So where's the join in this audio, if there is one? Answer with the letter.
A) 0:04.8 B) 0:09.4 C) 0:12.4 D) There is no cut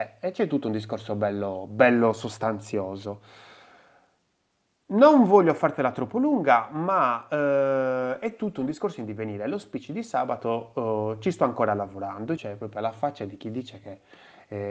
C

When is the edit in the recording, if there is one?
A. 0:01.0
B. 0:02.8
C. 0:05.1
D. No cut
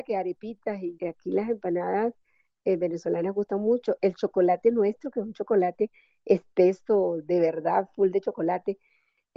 A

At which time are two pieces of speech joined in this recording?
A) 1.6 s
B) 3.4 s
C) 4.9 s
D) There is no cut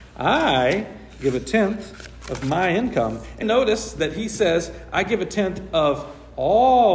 B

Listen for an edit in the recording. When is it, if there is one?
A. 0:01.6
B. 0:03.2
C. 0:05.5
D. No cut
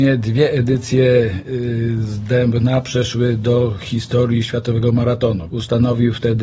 C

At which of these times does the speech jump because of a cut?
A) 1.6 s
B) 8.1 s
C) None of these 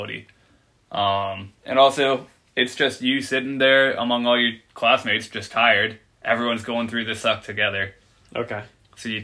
A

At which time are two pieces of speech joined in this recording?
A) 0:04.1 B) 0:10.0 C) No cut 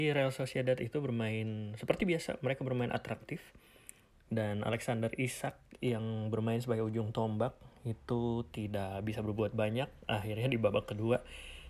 A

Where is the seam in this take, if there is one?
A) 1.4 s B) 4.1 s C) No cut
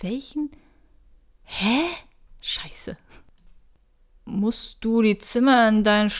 C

